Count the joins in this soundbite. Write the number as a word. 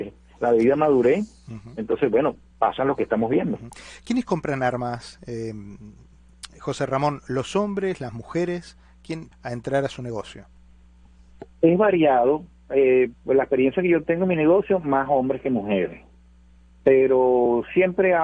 one